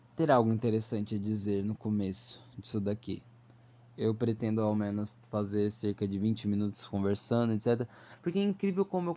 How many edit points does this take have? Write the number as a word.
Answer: zero